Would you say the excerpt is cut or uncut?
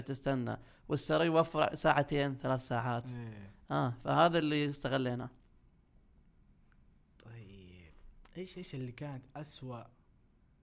uncut